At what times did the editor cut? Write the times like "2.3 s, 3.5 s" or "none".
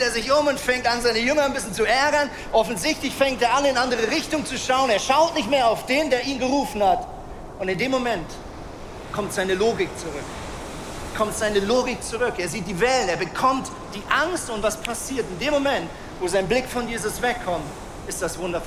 none